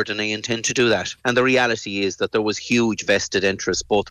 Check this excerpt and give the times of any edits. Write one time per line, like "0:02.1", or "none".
0:01.2

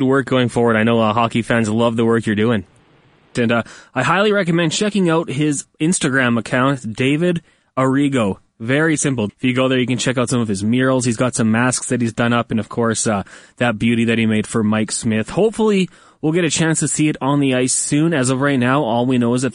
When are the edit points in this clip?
0:03.4
0:09.3

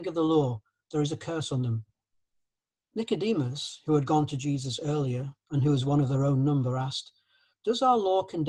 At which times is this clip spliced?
none

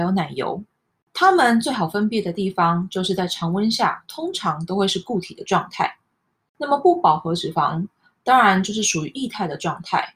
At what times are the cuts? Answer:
none

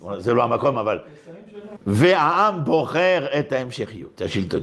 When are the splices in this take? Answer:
0:01.8

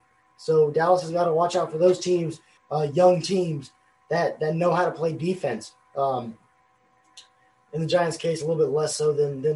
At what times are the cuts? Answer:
0:02.6

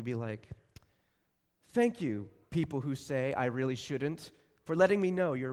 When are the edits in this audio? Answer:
none

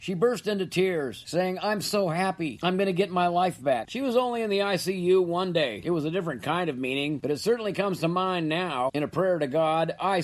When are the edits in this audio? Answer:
0:03.9
0:05.8

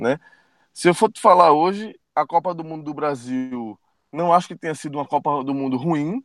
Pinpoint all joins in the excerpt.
0:02.0

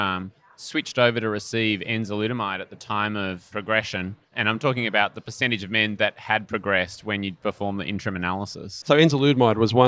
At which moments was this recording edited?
0:08.8

